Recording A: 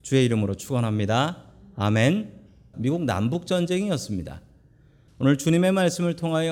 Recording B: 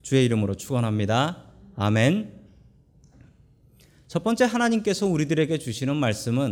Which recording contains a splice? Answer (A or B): A